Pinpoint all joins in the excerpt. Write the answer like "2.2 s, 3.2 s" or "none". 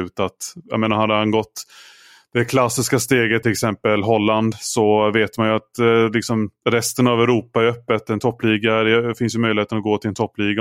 3.4 s